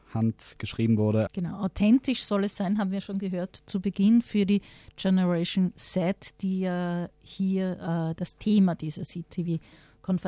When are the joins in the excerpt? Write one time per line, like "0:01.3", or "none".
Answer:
0:01.3